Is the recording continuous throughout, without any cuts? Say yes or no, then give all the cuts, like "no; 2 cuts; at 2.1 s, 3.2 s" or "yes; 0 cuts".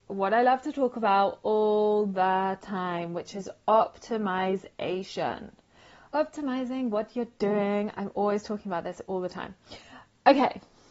yes; 0 cuts